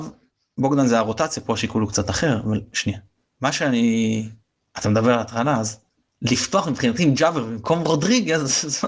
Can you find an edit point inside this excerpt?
no; 0 cuts

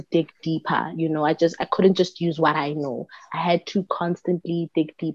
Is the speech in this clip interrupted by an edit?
no; 0 cuts

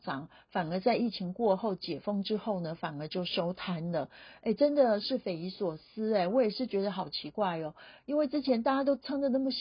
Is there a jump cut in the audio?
no; 0 cuts

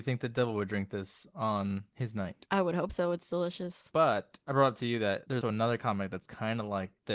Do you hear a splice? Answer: yes; 2 cuts; at 3.9 s, 5.4 s

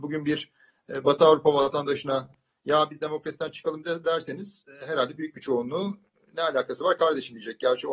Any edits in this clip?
no; 0 cuts

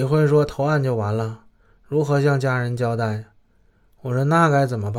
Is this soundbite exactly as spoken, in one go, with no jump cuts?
yes; 0 cuts

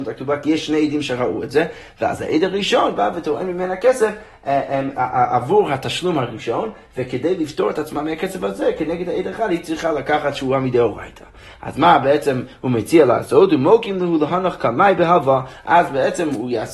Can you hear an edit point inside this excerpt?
no; 0 cuts

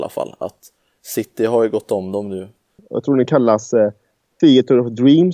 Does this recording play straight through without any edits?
no; 1 cut; at 2.8 s

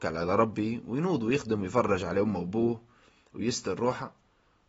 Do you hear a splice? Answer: no; 0 cuts

